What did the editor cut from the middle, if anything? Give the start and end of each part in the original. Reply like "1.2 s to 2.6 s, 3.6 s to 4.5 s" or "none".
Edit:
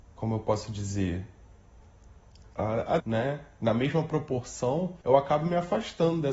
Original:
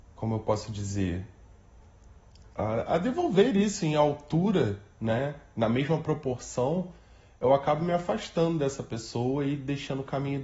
3.0 s to 4.9 s, 7.0 s to 7.4 s